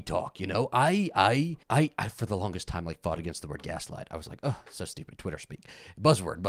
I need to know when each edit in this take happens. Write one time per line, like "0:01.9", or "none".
0:01.6